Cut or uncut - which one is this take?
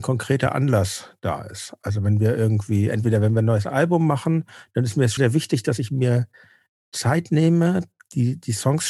cut